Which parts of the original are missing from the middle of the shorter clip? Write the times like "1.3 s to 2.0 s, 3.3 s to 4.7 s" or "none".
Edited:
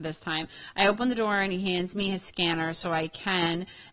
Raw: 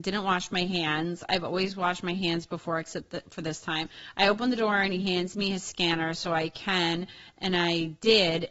none